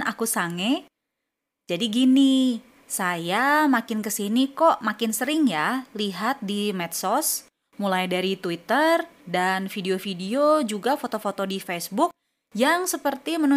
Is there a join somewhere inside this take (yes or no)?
yes